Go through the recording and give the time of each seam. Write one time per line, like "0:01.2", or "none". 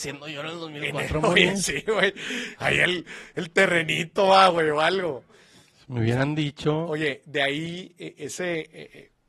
none